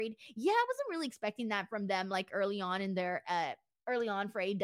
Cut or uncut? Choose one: uncut